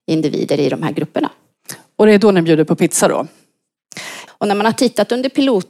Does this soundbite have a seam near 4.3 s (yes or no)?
yes